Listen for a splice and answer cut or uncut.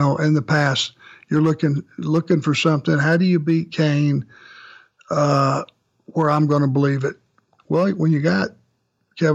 cut